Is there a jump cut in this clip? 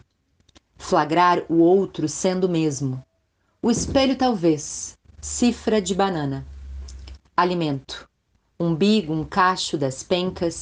yes; 1 cut; at 5.0 s

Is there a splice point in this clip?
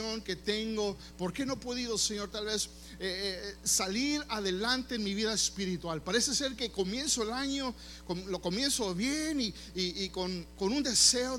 no; 0 cuts

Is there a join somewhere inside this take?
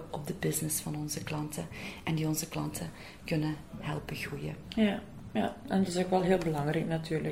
no; 0 cuts

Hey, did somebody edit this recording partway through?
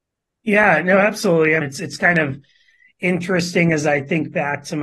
yes; 1 cut; at 1.6 s

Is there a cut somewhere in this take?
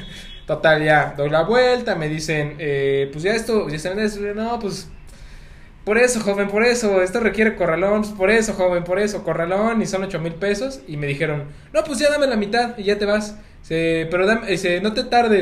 no; 0 cuts

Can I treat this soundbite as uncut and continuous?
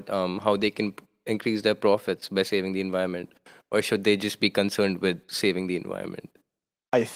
yes; 0 cuts

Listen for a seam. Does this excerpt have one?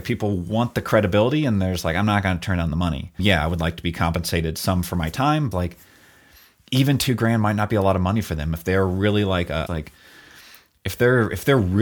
yes; 2 cuts; at 5.5 s, 9.7 s

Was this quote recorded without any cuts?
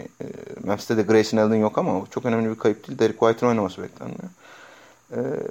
yes; 0 cuts

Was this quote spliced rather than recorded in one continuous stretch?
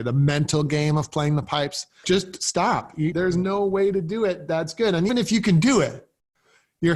yes; 3 cuts; at 2.0 s, 3.1 s, 5.1 s

